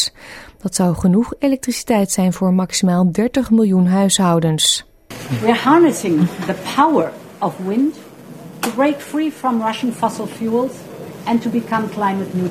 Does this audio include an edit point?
no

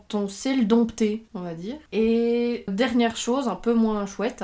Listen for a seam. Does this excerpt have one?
yes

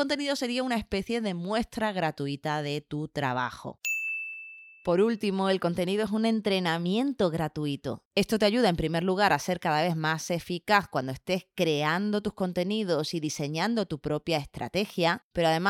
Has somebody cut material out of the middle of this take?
yes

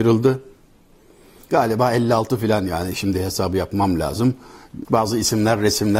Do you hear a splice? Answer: yes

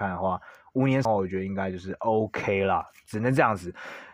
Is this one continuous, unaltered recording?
no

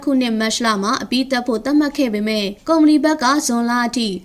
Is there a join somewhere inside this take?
yes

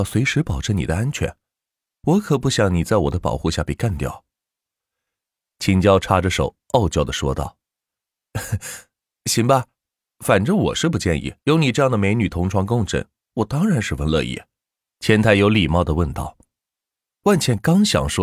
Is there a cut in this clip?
yes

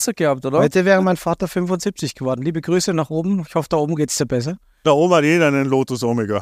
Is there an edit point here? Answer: no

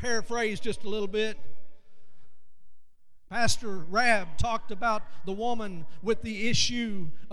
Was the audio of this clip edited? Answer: yes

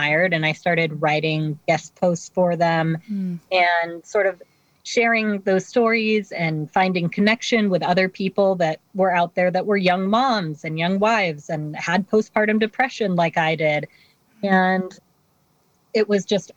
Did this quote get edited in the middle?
no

